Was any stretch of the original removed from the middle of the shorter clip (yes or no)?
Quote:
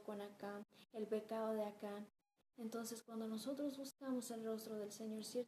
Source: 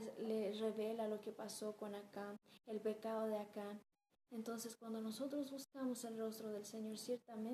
no